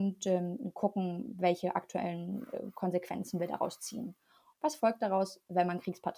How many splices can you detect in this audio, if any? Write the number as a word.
one